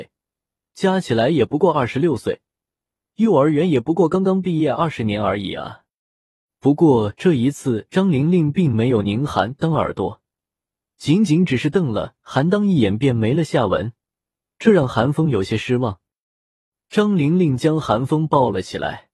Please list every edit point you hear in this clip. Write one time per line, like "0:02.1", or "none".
none